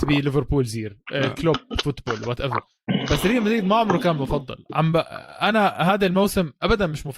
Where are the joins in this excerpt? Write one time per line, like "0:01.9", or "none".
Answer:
none